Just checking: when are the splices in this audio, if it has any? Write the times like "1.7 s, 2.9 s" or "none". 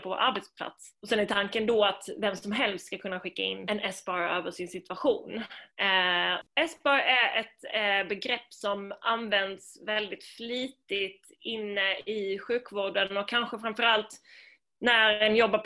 6.4 s